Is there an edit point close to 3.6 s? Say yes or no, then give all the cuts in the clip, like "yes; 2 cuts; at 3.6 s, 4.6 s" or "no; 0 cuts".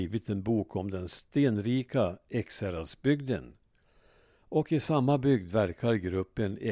no; 0 cuts